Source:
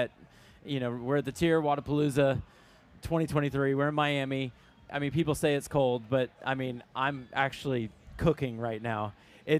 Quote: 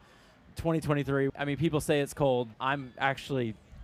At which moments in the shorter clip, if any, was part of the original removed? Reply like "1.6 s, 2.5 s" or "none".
1.3 s, 2.5 s

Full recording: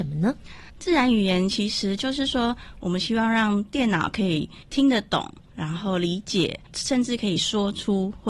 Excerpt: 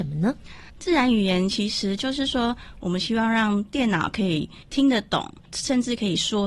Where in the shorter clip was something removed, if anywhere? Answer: 5.4 s

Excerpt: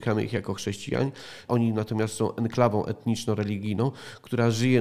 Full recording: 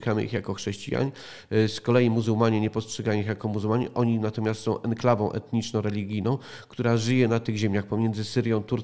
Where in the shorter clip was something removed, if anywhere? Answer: 1.5 s

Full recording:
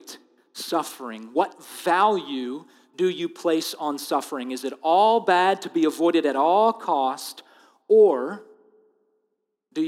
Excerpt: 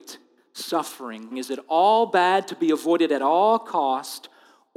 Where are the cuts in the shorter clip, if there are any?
1.3 s

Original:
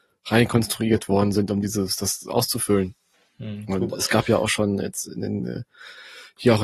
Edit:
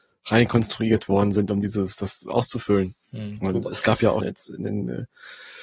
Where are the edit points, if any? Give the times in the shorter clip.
3.0 s, 4.2 s

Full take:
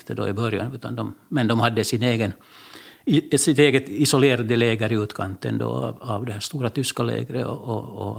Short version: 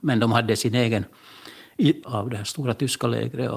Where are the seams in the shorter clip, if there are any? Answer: 2.0 s

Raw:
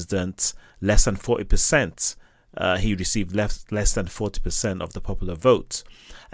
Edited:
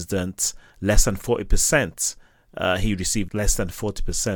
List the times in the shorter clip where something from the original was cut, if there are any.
3.3 s

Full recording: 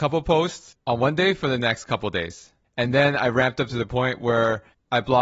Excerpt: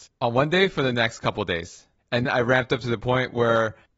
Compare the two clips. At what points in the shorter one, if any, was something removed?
2.2 s

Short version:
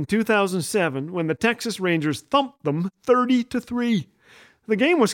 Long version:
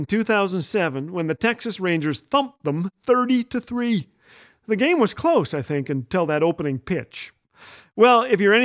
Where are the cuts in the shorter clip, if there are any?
none

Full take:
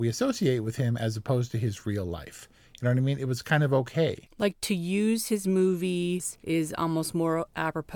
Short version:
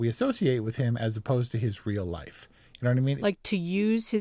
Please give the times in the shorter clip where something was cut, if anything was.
3.2 s

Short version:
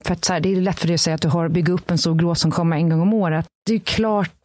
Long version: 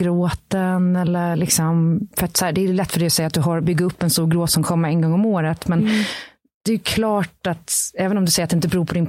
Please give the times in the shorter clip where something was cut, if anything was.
3.5 s

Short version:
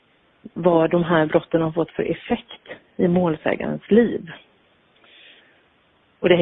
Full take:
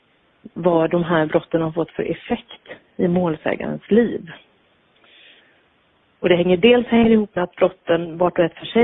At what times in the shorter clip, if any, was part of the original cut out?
none

